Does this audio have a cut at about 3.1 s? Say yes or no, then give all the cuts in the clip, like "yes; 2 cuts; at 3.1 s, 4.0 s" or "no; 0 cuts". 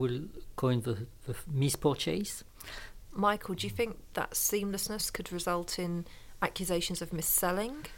yes; 1 cut; at 3.1 s